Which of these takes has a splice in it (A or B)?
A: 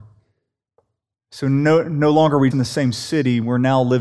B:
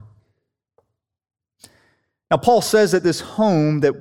A